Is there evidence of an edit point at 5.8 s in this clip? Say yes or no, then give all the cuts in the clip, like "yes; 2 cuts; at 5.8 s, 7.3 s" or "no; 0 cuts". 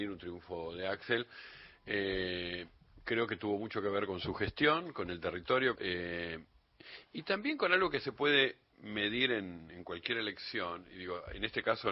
yes; 1 cut; at 5.8 s